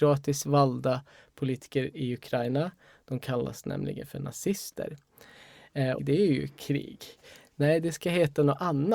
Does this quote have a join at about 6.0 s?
yes; 1 cut; at 6.0 s

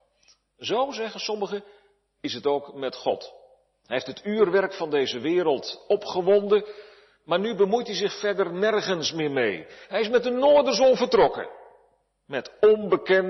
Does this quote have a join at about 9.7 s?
no; 0 cuts

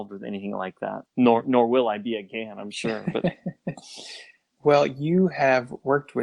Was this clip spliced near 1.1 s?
yes; 1 cut; at 1.1 s

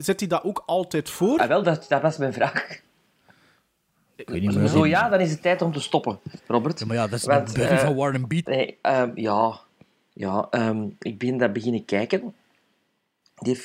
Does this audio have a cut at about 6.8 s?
no; 1 cut; at 8.5 s

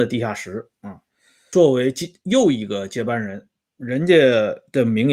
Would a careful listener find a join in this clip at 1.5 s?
yes; 1 cut; at 1.5 s

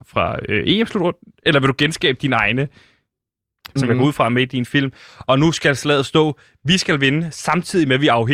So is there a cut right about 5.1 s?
yes; 2 cuts; at 3.8 s, 5.1 s

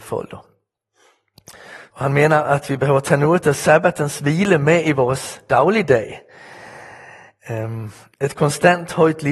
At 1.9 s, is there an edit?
yes; 1 cut; at 1.9 s

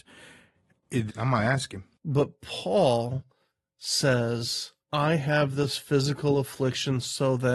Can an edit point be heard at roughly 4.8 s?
yes; 2 cuts; at 1.1 s, 4.8 s

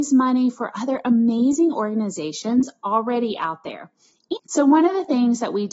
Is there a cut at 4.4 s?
yes; 1 cut; at 4.4 s

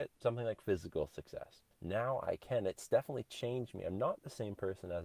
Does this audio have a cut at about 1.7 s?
yes; 1 cut; at 1.7 s

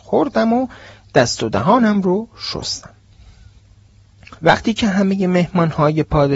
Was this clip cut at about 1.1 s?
no; 1 cut; at 4.4 s

